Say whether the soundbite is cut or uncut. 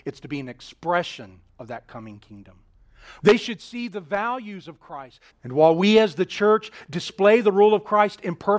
cut